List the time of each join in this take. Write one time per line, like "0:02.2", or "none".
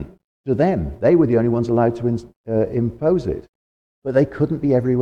none